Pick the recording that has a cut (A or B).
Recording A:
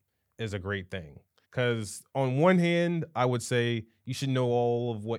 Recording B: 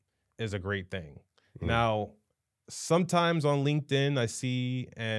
A